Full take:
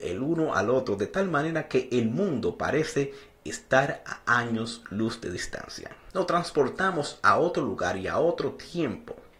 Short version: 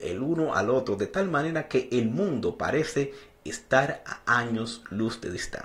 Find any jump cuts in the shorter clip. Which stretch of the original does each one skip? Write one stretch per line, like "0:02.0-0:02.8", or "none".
none